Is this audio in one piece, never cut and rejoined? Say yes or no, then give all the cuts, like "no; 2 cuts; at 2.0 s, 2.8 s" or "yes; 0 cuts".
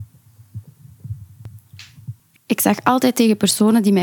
no; 1 cut; at 2.4 s